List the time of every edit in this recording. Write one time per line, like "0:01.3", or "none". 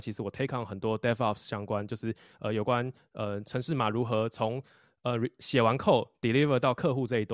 none